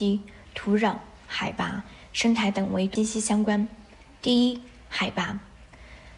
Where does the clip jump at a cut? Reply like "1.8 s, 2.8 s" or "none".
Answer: 3.0 s